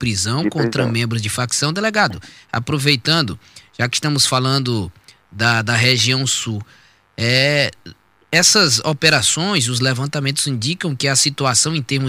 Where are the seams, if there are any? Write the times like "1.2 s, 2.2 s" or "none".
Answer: none